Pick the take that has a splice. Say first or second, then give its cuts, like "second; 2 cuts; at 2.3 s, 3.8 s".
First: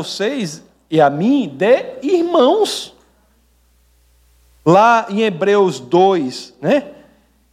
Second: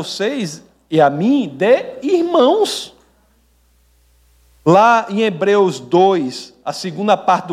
first; 1 cut; at 6.6 s